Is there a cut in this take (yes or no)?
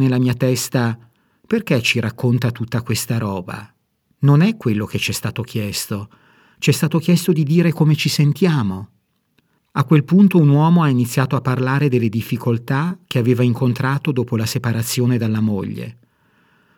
yes